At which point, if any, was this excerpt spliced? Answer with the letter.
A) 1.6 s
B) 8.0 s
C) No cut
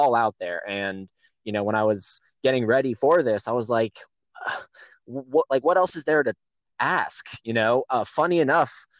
C